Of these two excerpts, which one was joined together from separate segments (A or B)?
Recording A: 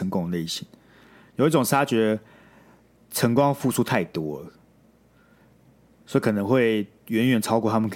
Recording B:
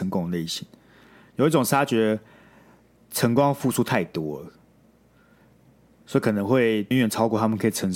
B